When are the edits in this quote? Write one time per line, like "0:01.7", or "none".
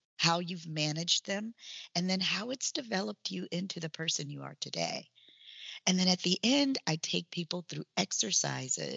none